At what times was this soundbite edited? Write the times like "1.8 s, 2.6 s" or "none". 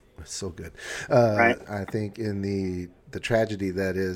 1.7 s